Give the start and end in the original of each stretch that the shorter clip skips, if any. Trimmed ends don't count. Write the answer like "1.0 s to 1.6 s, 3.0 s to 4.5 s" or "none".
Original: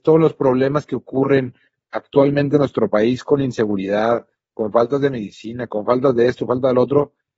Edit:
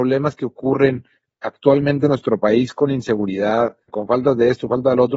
4.4 s to 5.7 s